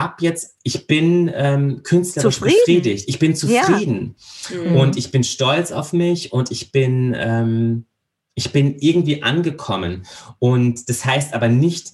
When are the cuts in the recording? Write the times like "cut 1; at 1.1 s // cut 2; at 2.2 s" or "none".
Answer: none